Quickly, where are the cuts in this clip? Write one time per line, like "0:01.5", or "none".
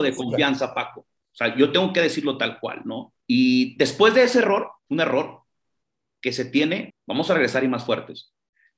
0:03.2
0:04.8
0:06.9